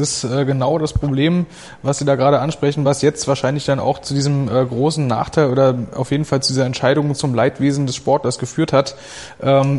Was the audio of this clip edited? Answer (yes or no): no